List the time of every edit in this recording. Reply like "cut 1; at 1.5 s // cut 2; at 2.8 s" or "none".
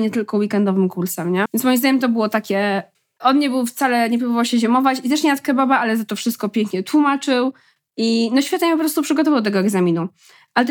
cut 1; at 1.5 s // cut 2; at 3.2 s // cut 3; at 7.8 s